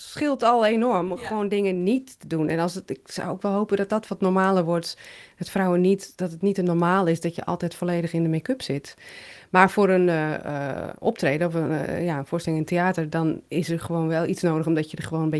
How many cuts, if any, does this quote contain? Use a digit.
0